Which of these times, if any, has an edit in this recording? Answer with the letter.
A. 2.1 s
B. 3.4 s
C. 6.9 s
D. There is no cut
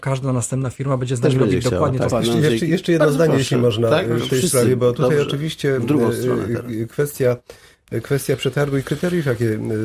A